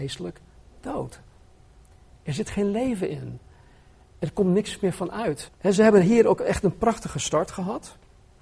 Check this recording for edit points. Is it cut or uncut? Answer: cut